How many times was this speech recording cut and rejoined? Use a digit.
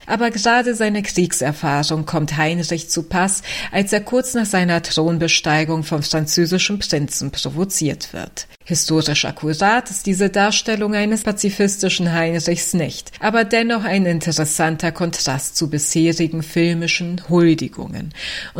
2